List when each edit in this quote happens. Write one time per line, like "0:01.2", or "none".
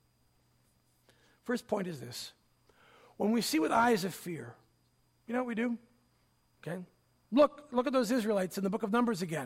0:06.5